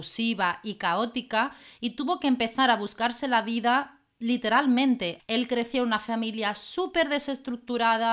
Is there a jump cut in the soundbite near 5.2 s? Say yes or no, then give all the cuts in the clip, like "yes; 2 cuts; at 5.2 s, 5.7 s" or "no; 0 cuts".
yes; 1 cut; at 5.2 s